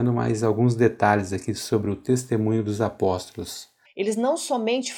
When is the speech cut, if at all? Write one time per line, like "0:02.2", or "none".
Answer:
0:03.8